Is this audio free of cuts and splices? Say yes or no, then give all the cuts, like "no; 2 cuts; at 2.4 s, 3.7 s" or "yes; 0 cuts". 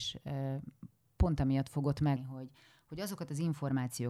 no; 1 cut; at 2.2 s